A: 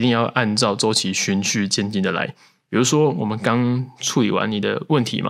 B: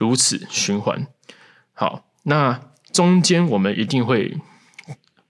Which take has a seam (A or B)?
A